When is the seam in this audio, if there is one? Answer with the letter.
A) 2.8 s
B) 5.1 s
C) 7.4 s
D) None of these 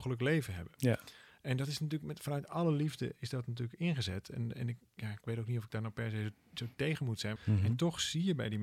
C